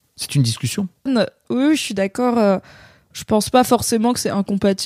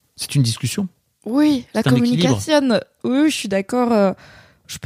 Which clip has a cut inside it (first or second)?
first